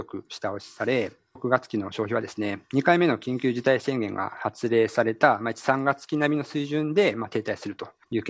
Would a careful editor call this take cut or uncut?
cut